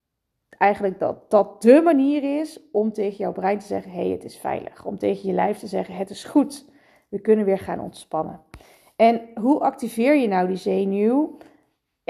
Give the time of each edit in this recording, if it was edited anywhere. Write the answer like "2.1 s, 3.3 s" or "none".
none